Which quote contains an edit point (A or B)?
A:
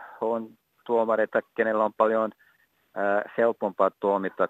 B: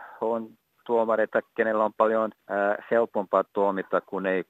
B